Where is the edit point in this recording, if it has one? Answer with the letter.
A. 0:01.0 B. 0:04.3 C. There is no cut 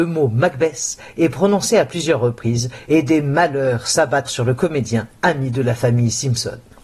B